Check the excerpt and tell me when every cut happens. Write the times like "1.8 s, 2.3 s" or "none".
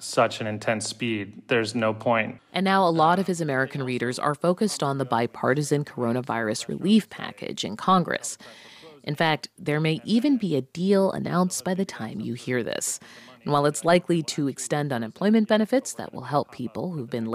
2.4 s